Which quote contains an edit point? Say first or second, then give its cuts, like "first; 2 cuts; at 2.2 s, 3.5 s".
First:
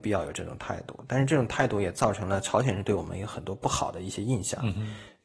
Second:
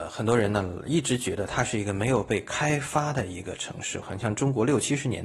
second; 1 cut; at 4.0 s